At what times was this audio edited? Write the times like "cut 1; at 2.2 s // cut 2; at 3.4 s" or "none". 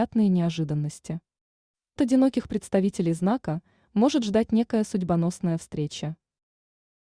cut 1; at 2.0 s